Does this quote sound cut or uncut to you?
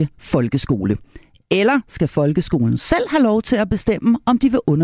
uncut